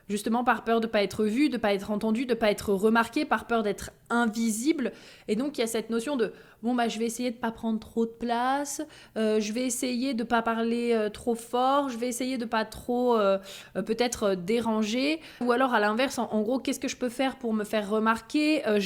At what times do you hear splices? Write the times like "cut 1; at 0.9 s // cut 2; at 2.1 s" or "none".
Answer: cut 1; at 15.4 s